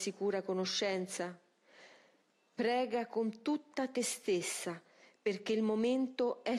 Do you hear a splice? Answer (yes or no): no